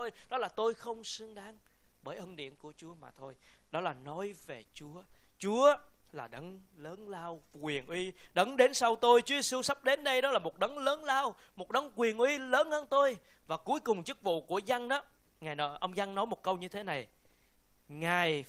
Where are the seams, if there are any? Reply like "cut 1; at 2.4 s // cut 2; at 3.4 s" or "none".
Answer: none

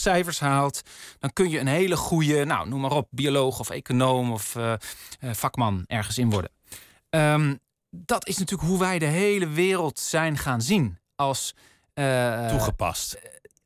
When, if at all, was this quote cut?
none

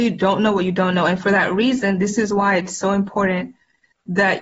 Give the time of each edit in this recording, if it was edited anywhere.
none

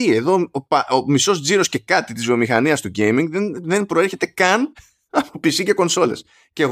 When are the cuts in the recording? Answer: none

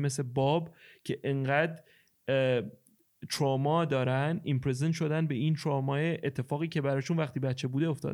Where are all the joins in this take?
none

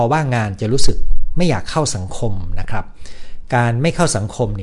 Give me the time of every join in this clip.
none

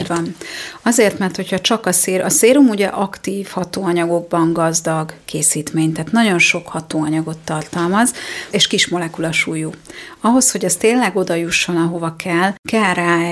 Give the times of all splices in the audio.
cut 1; at 8.5 s

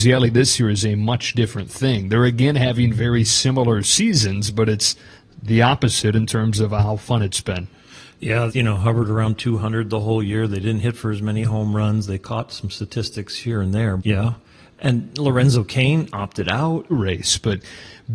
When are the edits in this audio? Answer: cut 1; at 8.5 s // cut 2; at 14.0 s // cut 3; at 16.9 s

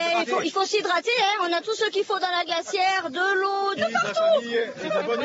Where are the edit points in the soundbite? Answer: cut 1; at 3.8 s

